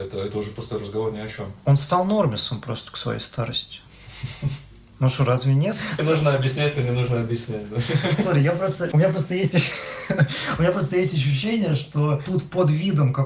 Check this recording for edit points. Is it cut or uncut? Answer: cut